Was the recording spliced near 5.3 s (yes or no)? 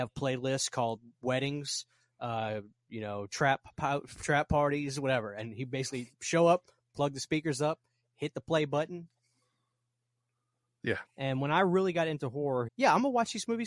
no